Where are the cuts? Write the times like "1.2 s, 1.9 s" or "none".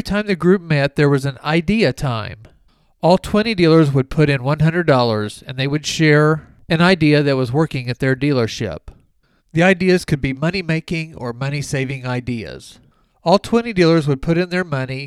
9.4 s